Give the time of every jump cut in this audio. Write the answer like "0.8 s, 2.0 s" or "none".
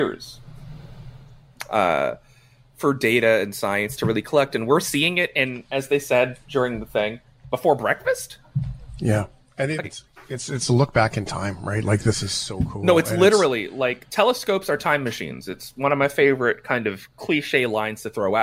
9.8 s

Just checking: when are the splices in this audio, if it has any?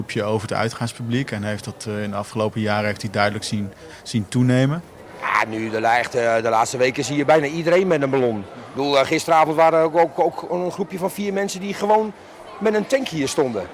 none

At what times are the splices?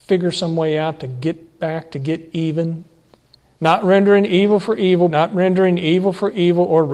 3.6 s, 5.1 s

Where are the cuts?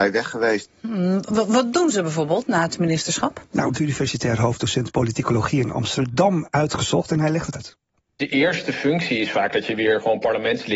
3.7 s, 7.5 s

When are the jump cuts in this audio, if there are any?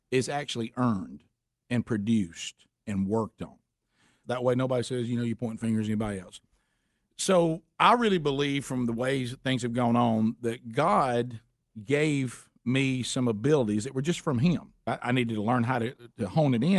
4.2 s, 14.9 s

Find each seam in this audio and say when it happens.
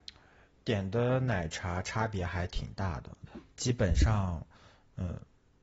3.3 s

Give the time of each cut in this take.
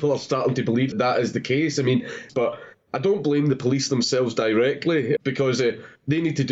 0.9 s, 2.3 s, 5.2 s

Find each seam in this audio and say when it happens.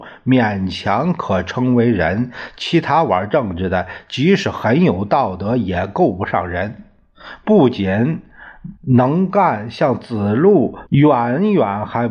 8.8 s, 10.9 s

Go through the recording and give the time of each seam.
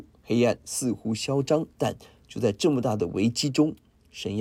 1.7 s

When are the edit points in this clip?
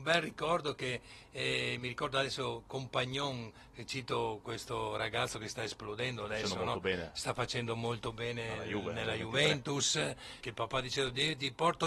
10.4 s

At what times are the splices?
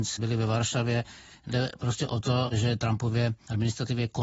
none

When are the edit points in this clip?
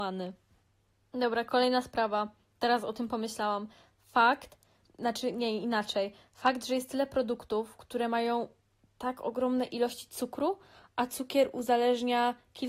4.8 s

